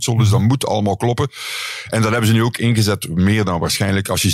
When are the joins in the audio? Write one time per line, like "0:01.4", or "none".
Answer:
none